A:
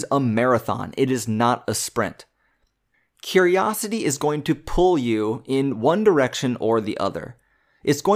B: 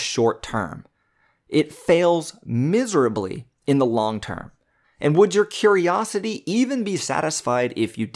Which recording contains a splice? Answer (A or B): B